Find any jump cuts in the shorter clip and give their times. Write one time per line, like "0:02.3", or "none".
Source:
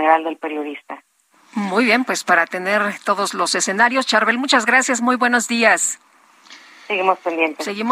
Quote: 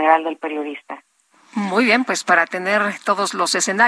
none